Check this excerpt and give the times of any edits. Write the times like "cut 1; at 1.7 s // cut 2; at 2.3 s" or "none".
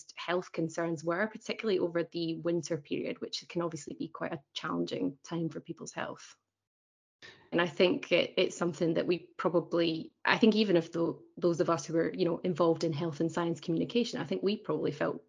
cut 1; at 7.5 s